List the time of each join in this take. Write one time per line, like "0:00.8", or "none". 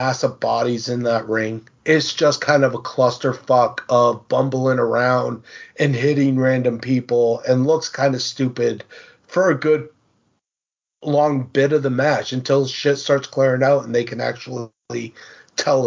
none

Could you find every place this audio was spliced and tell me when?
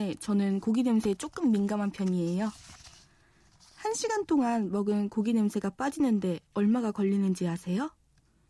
none

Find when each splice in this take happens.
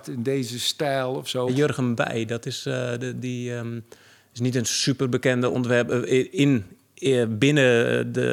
0:01.5

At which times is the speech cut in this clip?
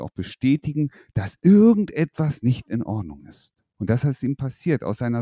0:03.8

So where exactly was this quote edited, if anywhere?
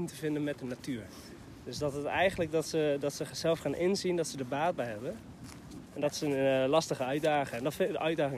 0:05.9

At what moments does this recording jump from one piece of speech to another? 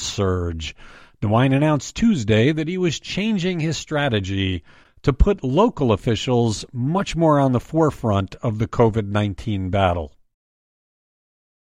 none

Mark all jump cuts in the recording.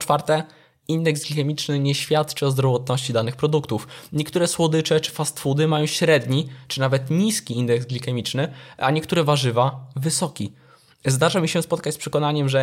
none

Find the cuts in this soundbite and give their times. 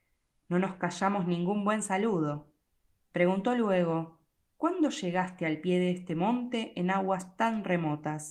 none

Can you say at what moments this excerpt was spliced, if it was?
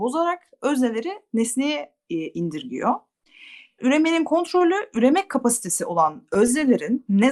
0:03.8

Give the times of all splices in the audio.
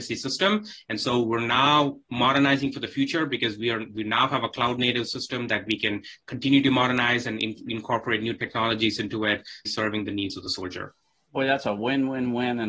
0:09.6

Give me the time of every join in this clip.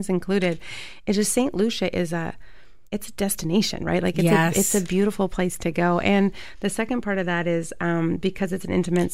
0:02.9

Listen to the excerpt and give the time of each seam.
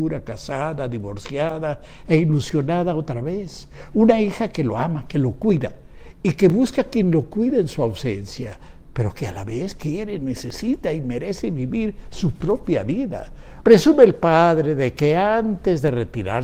0:13.6

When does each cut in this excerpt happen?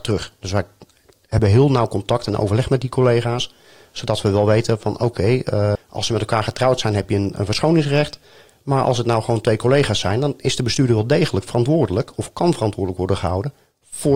0:05.8

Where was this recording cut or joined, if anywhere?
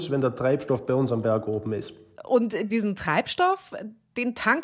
0:02.2

